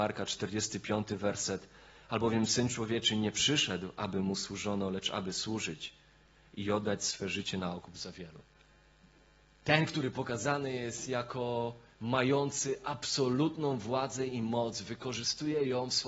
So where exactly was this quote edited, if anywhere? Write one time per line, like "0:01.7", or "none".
none